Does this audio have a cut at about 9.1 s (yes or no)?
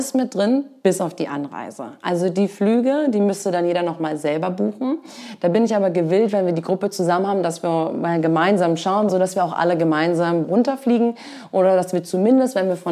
yes